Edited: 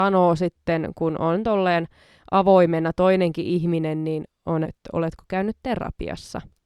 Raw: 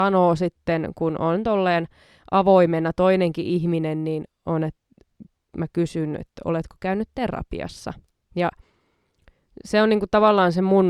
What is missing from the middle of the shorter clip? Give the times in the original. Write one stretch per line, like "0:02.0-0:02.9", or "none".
0:04.6-0:06.2